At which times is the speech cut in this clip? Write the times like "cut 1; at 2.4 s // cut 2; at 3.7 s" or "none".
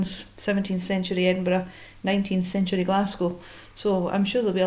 none